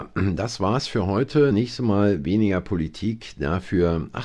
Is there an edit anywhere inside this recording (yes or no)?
no